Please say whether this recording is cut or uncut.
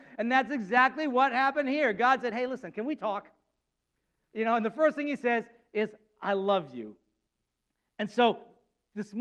uncut